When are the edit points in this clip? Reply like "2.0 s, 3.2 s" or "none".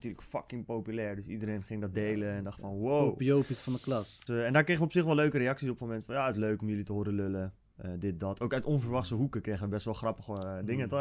4.3 s